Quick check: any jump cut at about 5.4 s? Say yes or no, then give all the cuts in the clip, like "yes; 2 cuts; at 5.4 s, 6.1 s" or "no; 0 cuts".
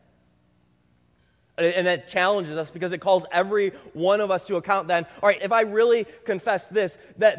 yes; 1 cut; at 5.4 s